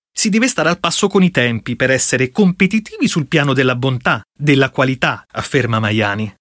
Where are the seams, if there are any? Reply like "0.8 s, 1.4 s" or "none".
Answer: 5.2 s

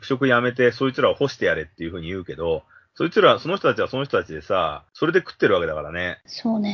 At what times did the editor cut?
none

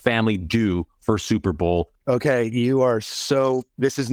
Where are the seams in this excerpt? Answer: 2.0 s

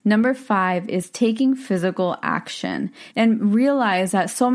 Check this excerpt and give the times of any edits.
3.1 s

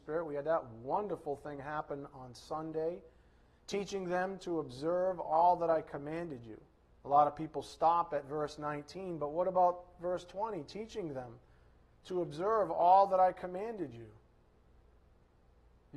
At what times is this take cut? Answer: 7.0 s

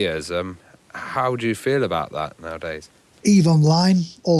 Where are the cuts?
3.2 s

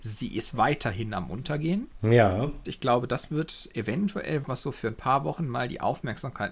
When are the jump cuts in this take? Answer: 2.6 s, 4.4 s

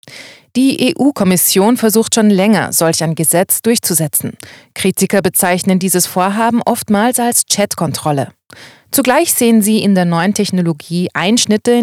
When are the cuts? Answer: none

